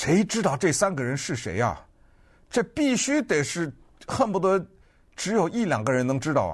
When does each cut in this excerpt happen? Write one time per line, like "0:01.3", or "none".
none